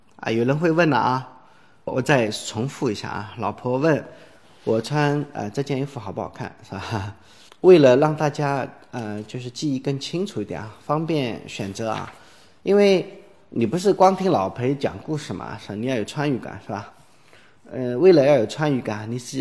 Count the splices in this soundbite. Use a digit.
1